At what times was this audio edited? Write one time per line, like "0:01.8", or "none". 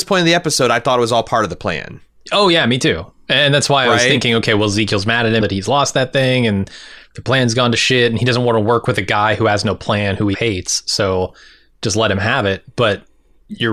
0:05.4
0:10.3